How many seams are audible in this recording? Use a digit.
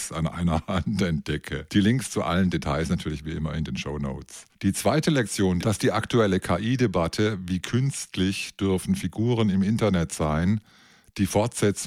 1